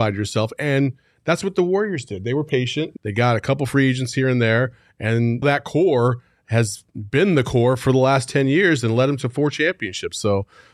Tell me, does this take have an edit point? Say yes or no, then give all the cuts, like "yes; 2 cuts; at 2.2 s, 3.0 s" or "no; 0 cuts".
yes; 2 cuts; at 3.0 s, 5.4 s